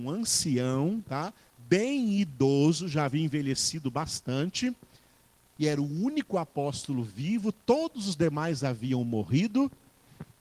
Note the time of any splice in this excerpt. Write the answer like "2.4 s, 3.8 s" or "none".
none